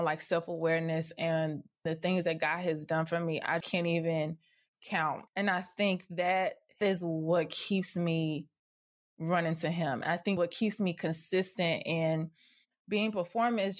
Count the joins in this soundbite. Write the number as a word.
two